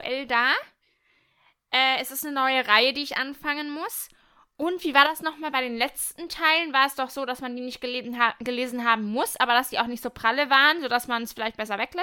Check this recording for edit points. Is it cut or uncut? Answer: uncut